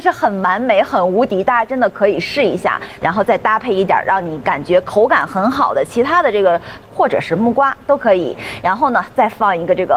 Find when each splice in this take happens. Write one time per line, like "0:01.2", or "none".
0:03.0
0:06.8

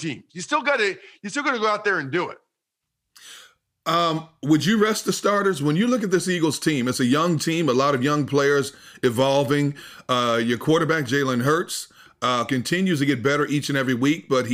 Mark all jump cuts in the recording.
none

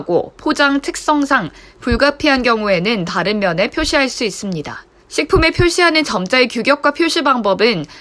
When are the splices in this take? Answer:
0:05.0

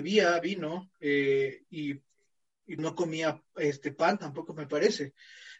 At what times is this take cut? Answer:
0:02.8

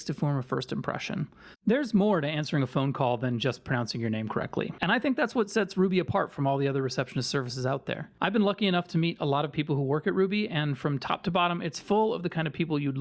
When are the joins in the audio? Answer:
0:01.5

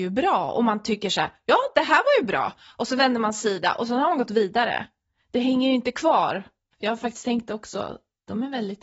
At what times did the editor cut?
0:06.7

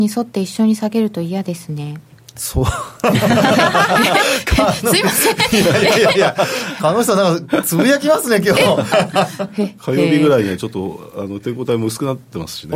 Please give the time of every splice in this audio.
0:08.9

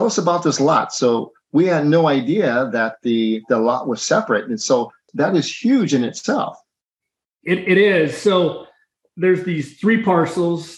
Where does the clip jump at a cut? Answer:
none

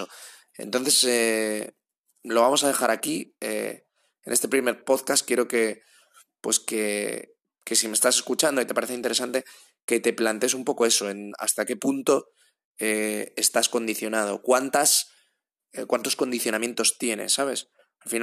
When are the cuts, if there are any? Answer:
none

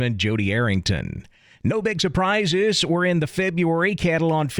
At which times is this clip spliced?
none

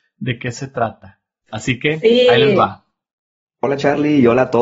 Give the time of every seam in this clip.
none

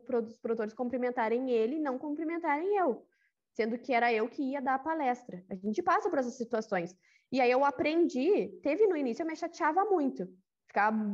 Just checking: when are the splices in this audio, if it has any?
none

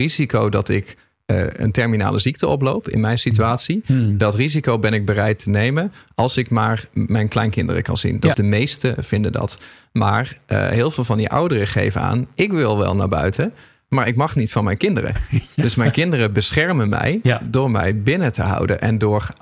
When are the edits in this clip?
0:08.3

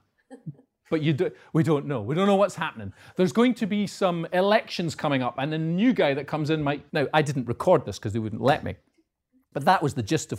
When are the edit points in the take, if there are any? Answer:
0:06.9

